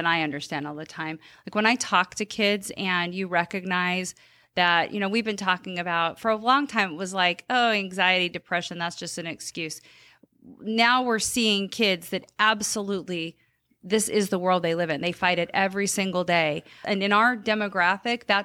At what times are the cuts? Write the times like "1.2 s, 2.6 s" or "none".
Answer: 16.8 s